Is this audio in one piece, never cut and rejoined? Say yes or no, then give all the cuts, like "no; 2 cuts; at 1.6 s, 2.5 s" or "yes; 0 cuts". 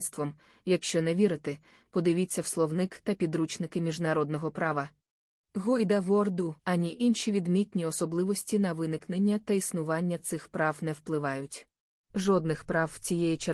no; 3 cuts; at 5.4 s, 6.6 s, 12.0 s